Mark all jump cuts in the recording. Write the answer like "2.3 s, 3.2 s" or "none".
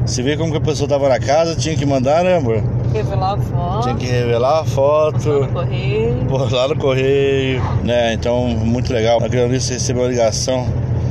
7.8 s, 9.2 s